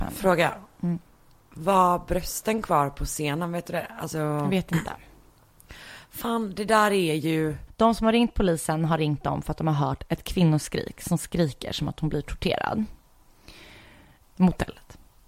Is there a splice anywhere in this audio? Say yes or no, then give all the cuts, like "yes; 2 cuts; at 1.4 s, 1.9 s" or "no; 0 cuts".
yes; 2 cuts; at 7.7 s, 14.2 s